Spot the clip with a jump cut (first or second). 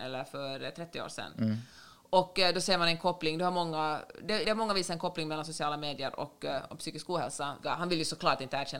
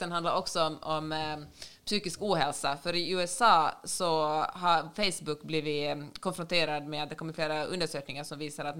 first